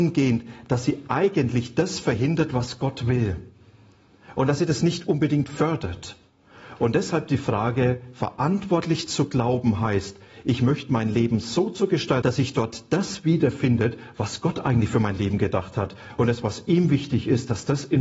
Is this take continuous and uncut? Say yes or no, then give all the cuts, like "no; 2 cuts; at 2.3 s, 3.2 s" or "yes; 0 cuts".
no; 1 cut; at 12.2 s